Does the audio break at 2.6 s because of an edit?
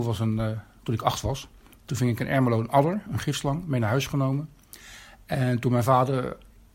no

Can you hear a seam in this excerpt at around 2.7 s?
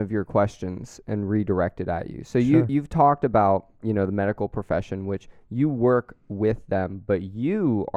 no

